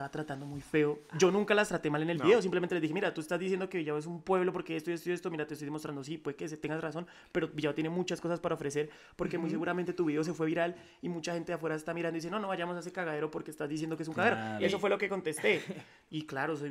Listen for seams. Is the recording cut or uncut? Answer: uncut